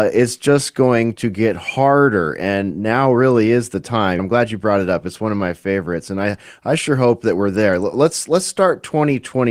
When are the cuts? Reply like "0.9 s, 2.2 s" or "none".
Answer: 4.2 s